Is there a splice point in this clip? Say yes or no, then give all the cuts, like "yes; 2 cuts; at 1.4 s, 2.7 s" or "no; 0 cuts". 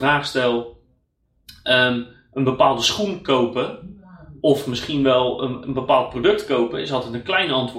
yes; 1 cut; at 5.6 s